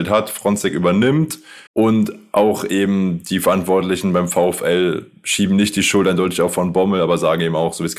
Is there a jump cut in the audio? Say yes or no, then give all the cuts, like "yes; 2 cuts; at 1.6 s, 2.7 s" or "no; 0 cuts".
yes; 1 cut; at 1.7 s